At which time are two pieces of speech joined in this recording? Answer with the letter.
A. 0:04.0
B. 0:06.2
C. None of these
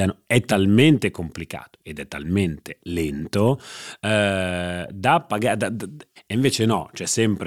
B